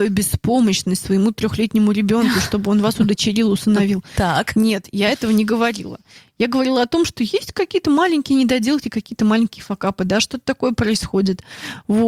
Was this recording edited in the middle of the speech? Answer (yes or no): no